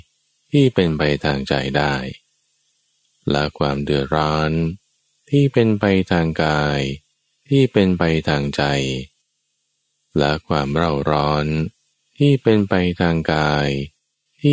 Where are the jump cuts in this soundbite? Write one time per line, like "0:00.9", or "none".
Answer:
none